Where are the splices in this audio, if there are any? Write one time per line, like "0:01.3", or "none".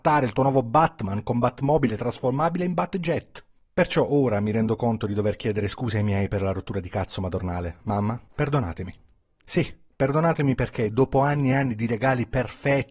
0:08.3